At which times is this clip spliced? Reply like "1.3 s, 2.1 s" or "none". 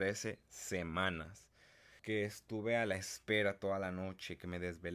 2.0 s